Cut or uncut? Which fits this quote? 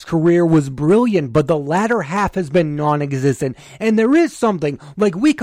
uncut